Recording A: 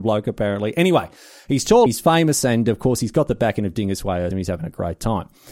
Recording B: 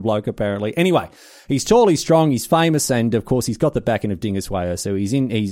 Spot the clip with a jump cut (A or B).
A